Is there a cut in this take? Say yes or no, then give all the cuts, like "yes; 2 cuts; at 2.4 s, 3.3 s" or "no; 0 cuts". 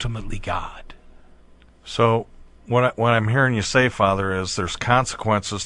yes; 1 cut; at 2.6 s